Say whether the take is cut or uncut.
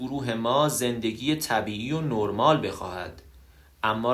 uncut